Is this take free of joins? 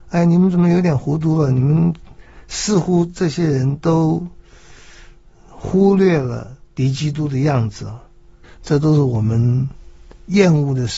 no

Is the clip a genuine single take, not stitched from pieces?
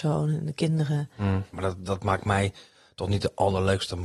no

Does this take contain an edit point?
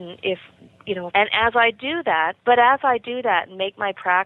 yes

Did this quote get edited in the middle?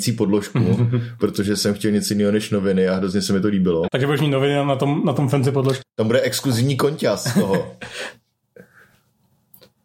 yes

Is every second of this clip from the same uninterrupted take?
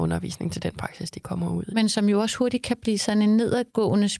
no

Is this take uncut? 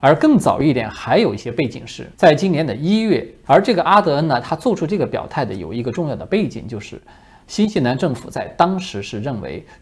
no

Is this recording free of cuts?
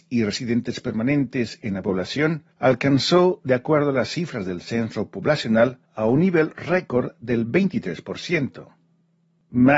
no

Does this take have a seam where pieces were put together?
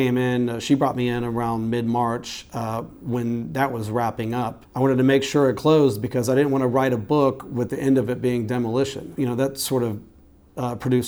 yes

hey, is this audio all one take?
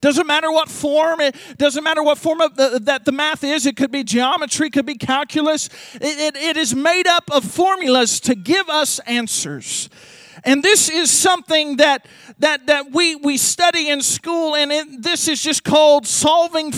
yes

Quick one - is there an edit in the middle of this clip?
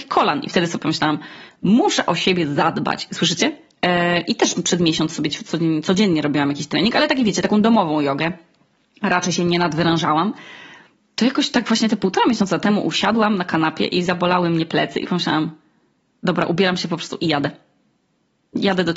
yes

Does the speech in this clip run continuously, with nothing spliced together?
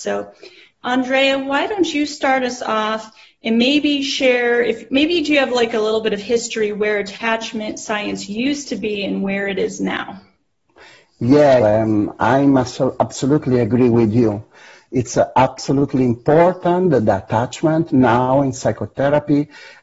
no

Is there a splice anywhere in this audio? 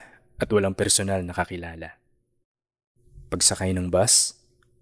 no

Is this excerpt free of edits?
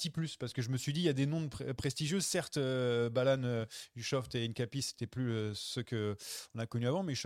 yes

